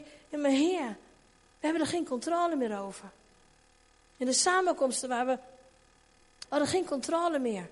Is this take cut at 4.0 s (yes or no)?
no